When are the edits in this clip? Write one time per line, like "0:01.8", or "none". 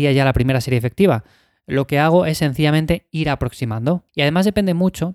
0:04.1